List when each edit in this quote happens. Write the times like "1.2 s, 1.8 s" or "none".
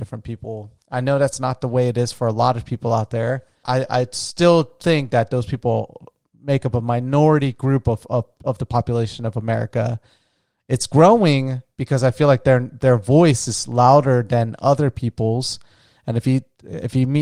3.6 s, 16.0 s